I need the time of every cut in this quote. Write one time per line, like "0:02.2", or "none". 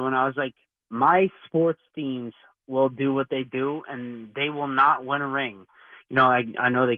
none